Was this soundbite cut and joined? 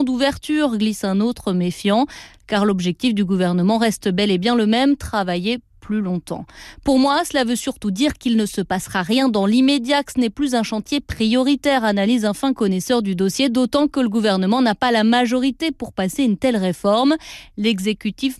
no; 0 cuts

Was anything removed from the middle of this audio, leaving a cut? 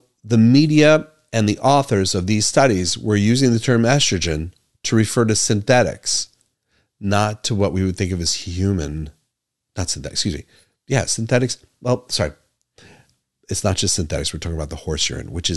no; 0 cuts

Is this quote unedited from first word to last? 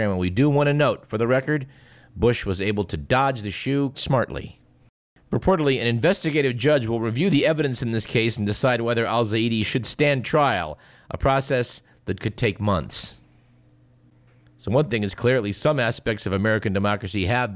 no; 1 cut; at 3.9 s

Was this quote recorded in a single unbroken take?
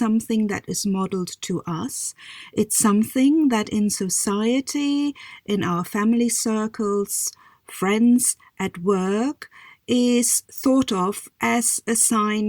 yes; 0 cuts

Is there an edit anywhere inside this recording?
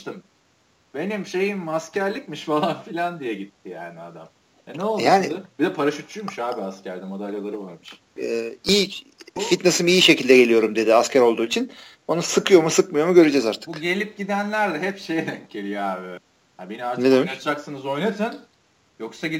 yes; 2 cuts; at 8.2 s, 16.2 s

